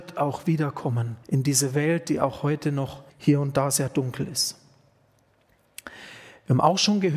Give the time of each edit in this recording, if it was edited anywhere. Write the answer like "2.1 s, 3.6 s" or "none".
1.2 s, 3.1 s